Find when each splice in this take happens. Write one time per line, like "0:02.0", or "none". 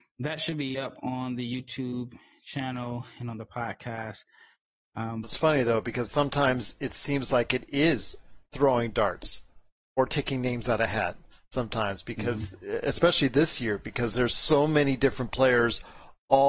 0:05.2